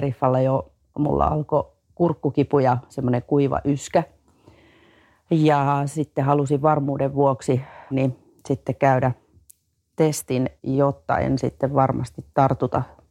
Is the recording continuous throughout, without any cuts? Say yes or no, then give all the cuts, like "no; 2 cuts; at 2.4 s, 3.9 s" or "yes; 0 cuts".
no; 2 cuts; at 7.9 s, 10.6 s